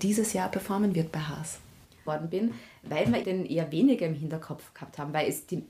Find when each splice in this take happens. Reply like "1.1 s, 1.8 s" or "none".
2.1 s, 3.2 s